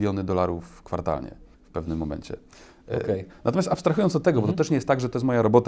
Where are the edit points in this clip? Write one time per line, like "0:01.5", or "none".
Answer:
0:01.5